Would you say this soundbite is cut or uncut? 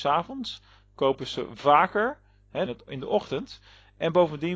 cut